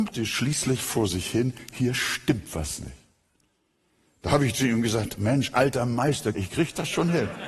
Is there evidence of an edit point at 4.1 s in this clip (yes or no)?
no